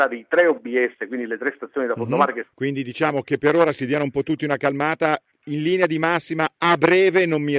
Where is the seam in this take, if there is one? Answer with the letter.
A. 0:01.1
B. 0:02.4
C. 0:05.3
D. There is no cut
B